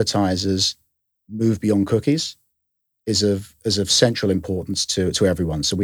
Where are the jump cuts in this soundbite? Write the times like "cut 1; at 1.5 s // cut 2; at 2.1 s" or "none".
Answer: none